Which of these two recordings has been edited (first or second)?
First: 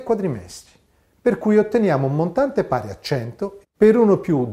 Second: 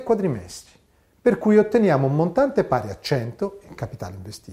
first